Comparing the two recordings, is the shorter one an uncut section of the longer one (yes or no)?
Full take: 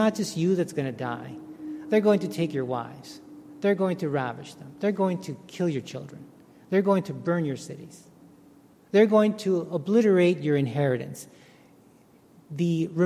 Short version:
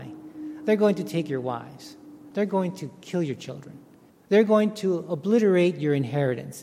no